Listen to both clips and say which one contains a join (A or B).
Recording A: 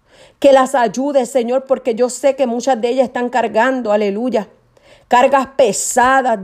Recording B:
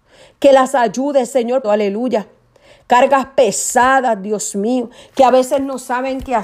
B